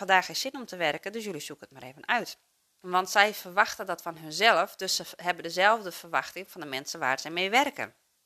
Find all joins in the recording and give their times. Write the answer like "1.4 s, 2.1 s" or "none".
2.8 s